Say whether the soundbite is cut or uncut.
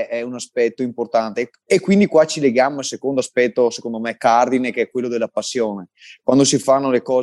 uncut